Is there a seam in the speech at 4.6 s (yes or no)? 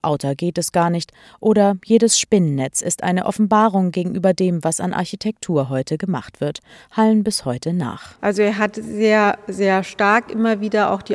no